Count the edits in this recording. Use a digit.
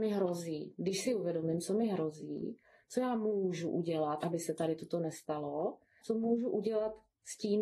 2